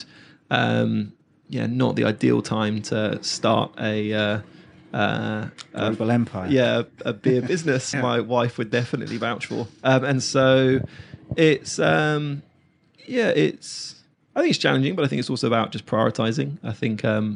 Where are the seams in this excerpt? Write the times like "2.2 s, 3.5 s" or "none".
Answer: 7.9 s